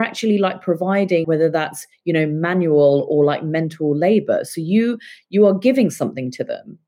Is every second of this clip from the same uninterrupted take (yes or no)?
no